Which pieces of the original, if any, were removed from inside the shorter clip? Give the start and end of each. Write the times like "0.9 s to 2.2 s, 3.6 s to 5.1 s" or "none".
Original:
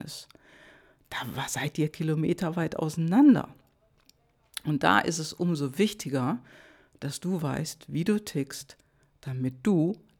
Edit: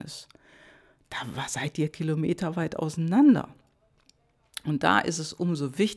none